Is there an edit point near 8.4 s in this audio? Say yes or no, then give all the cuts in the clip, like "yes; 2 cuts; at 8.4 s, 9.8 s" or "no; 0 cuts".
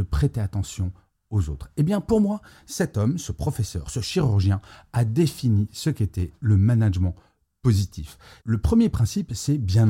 yes; 1 cut; at 8.4 s